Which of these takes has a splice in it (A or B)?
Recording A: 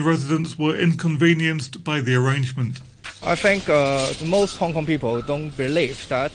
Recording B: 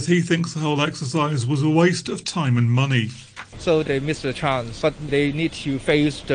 B